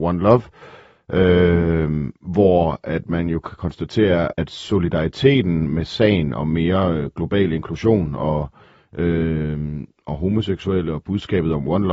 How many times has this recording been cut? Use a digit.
1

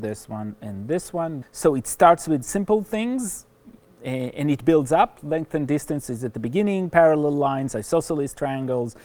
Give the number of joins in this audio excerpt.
1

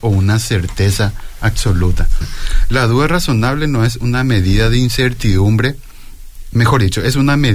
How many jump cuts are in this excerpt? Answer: 1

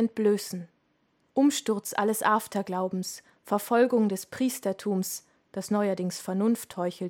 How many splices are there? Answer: 1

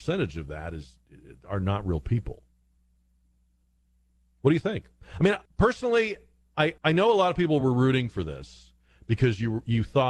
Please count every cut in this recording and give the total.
2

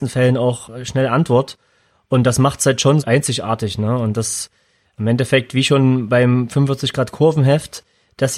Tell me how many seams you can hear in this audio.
1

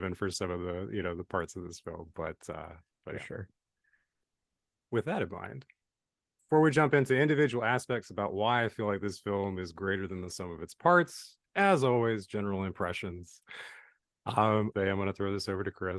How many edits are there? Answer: 1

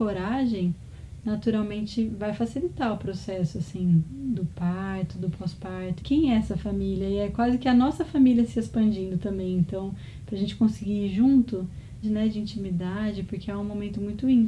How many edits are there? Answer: 2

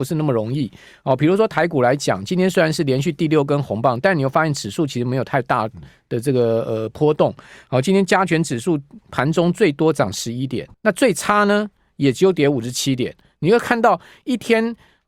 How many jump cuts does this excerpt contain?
1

